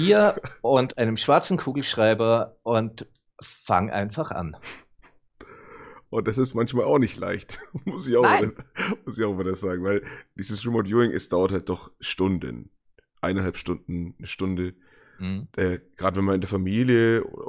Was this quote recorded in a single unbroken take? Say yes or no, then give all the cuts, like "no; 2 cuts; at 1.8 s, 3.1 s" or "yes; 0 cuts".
no; 1 cut; at 6.1 s